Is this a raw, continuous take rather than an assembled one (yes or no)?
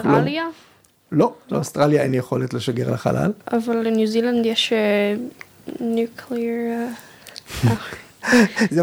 no